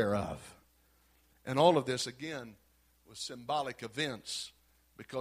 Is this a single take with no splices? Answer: yes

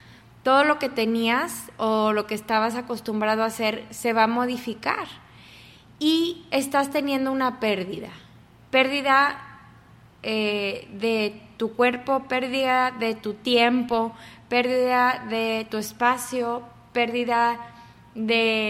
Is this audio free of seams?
no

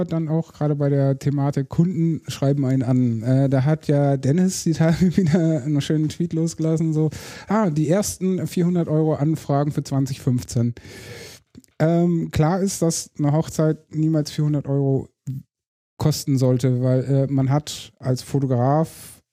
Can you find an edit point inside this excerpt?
no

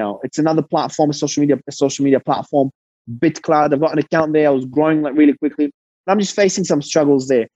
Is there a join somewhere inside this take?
no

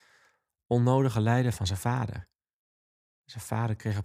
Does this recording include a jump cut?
no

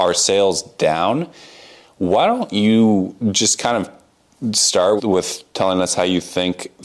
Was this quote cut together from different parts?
yes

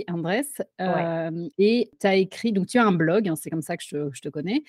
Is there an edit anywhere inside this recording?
no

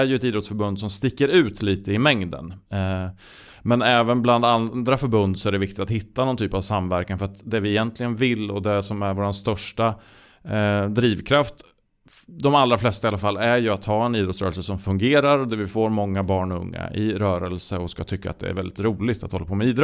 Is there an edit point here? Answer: no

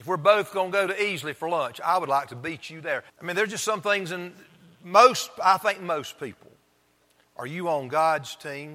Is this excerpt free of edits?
no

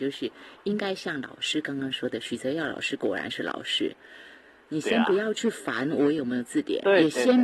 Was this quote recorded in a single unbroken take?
no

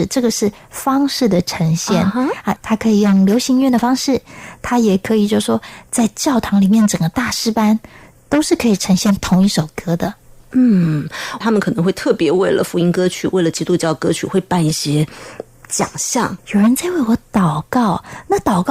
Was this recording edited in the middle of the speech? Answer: yes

